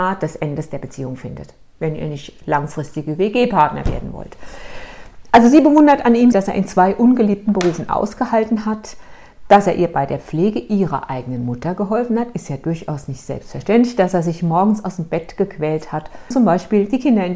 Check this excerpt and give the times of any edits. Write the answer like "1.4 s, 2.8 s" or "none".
6.3 s, 16.3 s